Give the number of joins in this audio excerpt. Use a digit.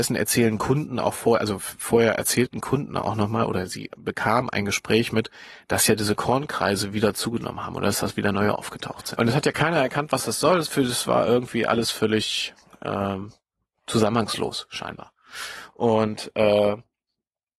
1